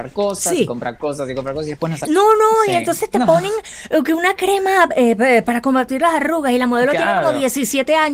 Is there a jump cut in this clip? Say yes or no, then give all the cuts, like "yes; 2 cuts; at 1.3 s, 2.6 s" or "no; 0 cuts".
yes; 1 cut; at 2.0 s